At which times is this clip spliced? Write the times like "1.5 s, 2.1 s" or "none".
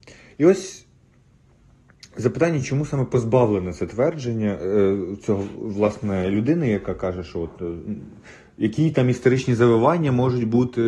none